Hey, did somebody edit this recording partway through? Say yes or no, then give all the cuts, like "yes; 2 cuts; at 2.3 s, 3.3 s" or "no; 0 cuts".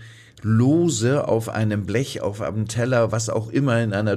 no; 0 cuts